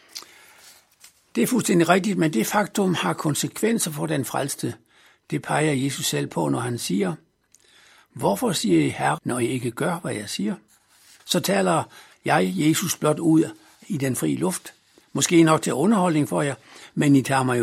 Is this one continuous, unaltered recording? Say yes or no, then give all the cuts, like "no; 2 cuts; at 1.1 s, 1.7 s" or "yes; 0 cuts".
no; 2 cuts; at 9.2 s, 11.2 s